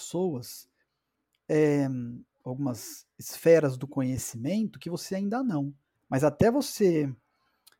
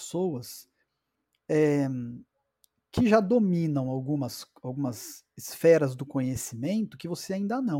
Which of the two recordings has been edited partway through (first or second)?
first